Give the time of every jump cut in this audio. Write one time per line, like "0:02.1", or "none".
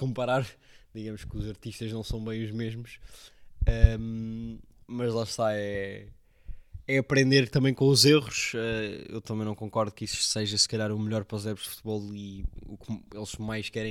none